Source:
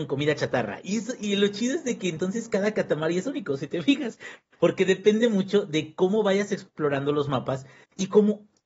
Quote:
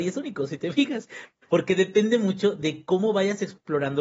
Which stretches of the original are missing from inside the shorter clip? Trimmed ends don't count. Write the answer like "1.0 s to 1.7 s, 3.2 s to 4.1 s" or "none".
none